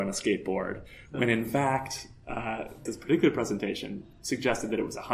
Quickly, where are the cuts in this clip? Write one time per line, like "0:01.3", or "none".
0:02.9